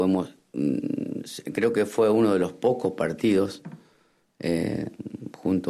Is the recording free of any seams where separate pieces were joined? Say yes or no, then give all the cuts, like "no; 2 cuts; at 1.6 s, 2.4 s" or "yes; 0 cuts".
yes; 0 cuts